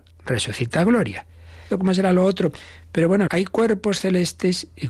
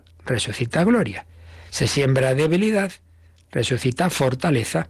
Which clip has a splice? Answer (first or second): first